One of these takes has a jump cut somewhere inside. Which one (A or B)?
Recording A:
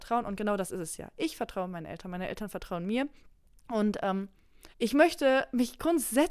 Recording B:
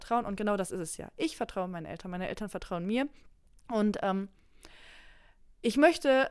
A